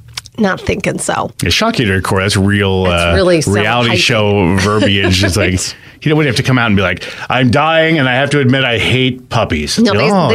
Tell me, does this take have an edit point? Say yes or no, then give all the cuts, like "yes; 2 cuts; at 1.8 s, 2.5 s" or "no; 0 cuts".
no; 0 cuts